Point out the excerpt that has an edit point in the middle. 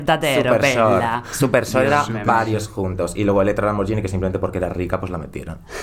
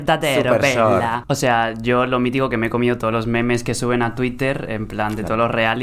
second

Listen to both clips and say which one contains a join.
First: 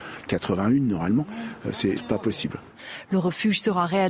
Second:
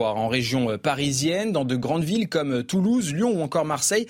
first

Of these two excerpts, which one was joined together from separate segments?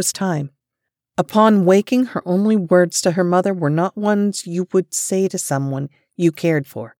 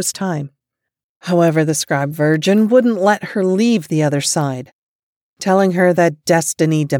second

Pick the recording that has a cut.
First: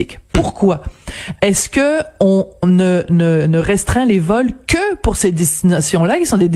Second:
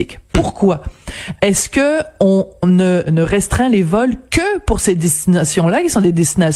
second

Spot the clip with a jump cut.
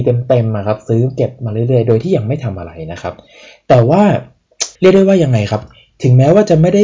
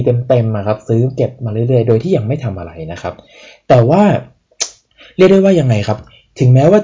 first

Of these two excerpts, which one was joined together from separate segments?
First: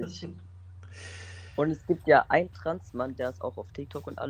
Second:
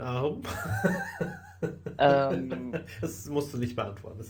first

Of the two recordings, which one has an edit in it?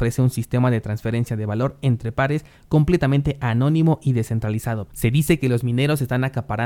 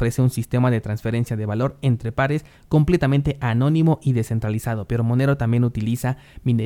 first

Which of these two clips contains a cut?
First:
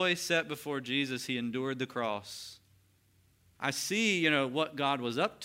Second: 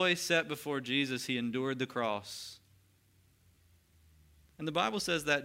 first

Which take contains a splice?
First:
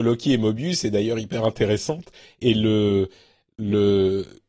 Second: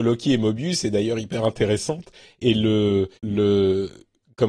second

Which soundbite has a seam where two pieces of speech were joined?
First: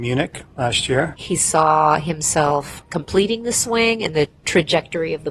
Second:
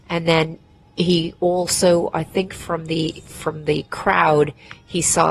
first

